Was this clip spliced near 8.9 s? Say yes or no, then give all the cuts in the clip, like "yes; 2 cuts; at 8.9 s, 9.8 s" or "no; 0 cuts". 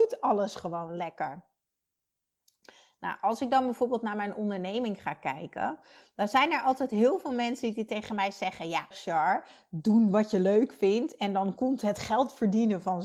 yes; 1 cut; at 8.9 s